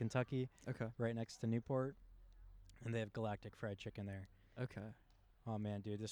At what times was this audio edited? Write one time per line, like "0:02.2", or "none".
none